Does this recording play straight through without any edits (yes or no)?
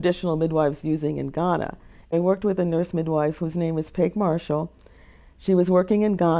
no